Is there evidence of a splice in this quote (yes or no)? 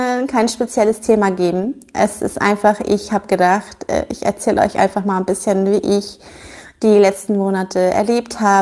no